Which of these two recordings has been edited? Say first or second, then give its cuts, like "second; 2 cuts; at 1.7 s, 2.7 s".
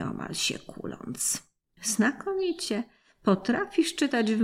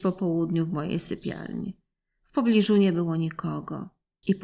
first; 1 cut; at 1.8 s